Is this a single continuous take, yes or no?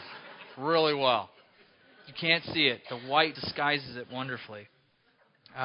no